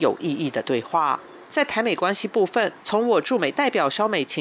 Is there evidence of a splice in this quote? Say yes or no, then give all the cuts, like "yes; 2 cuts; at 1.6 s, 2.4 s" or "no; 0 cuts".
yes; 2 cuts; at 1.4 s, 2.8 s